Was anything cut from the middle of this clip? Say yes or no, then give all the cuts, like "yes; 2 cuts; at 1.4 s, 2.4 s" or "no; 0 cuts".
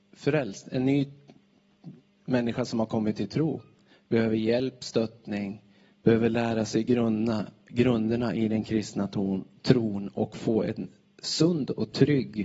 yes; 1 cut; at 5.9 s